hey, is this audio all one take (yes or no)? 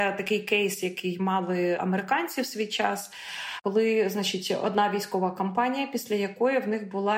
yes